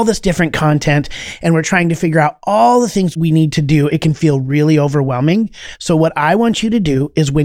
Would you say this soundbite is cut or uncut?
cut